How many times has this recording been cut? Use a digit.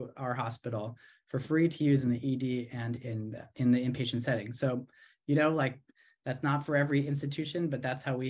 1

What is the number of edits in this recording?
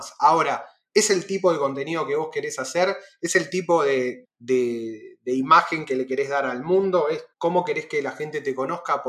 2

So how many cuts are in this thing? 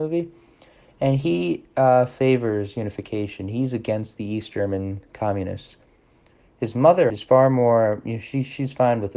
1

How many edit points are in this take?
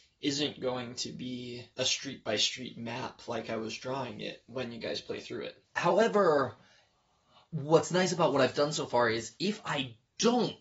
2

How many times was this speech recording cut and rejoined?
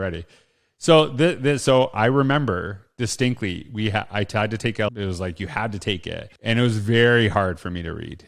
2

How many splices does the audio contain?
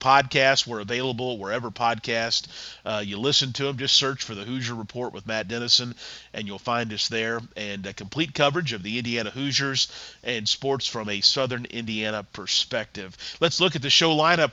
0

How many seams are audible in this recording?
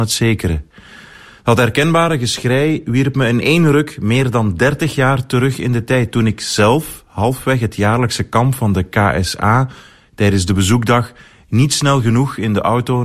0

